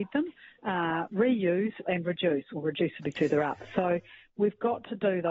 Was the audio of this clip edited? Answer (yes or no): yes